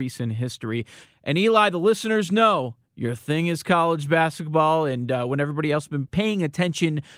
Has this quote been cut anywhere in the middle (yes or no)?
yes